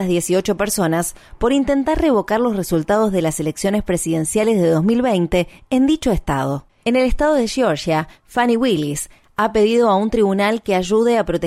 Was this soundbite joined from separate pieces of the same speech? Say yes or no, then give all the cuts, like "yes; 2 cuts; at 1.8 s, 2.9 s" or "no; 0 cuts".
yes; 2 cuts; at 6.8 s, 8.1 s